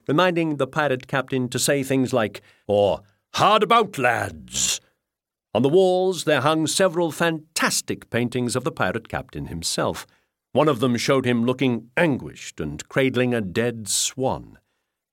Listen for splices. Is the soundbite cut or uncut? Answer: cut